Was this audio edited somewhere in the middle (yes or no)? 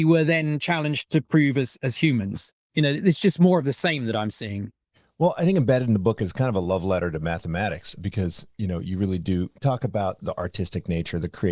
yes